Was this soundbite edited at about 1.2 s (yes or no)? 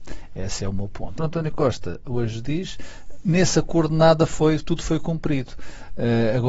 yes